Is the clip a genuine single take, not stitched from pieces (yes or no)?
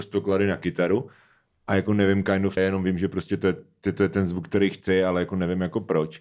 no